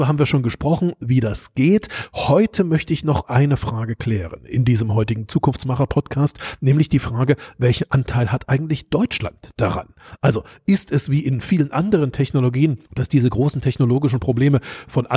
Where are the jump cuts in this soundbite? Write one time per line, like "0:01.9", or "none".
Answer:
0:12.8